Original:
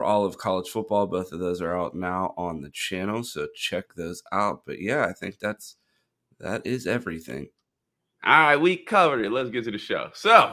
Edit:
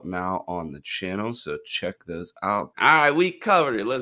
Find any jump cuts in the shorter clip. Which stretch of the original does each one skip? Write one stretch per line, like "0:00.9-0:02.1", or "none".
0:04.6-0:08.2